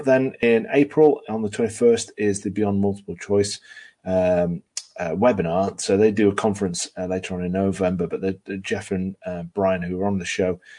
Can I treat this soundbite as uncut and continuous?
yes; 0 cuts

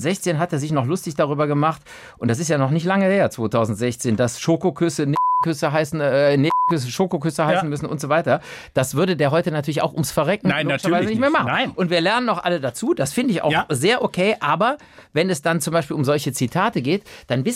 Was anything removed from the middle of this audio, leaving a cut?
no; 0 cuts

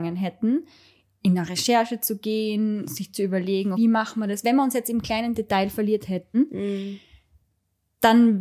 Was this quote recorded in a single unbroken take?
no; 2 cuts; at 3.7 s, 6.3 s

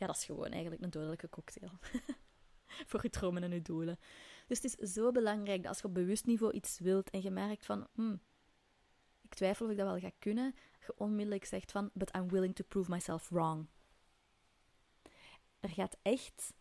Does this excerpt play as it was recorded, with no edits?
no; 2 cuts; at 7.9 s, 15.4 s

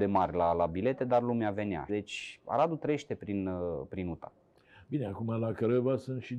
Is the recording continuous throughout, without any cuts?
no; 1 cut; at 1.9 s

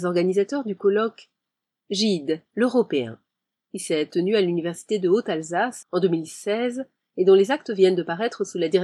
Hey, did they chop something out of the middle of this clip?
yes; 1 cut; at 5.8 s

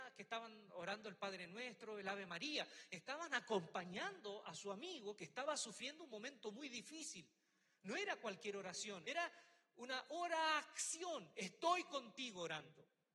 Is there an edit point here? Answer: yes; 1 cut; at 9.0 s

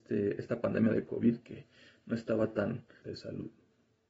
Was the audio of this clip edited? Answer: yes; 1 cut; at 3.0 s

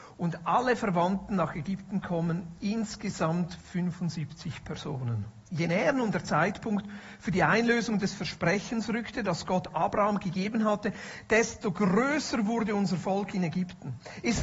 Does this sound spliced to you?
yes; 1 cut; at 5.5 s

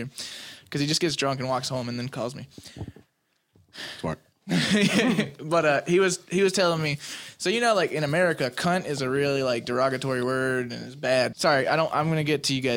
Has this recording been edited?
yes; 1 cut; at 11.3 s

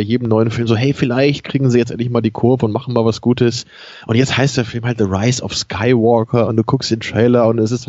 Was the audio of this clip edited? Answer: no; 0 cuts

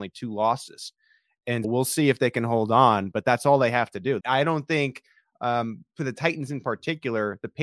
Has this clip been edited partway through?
yes; 2 cuts; at 1.6 s, 4.2 s

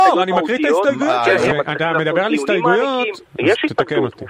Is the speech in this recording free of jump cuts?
no; 2 cuts; at 1.5 s, 3.3 s

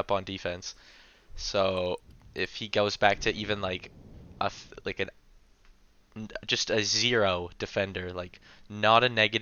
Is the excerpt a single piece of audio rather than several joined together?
yes; 0 cuts

